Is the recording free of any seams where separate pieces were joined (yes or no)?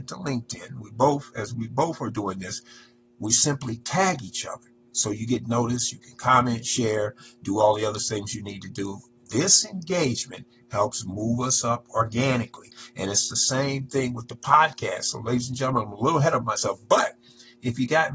yes